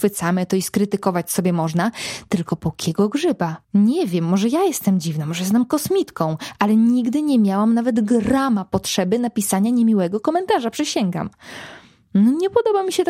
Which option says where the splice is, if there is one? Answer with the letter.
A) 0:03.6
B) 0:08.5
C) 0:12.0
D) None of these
A